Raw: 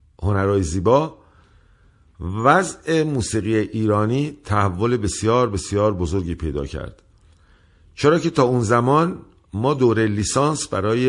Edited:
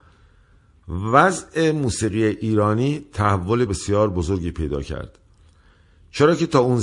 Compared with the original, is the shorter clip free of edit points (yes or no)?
no